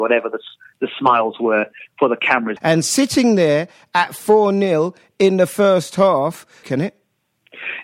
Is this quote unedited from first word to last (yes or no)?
no